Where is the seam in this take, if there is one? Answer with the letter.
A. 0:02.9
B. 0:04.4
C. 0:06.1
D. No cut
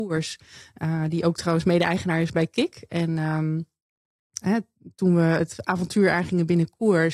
B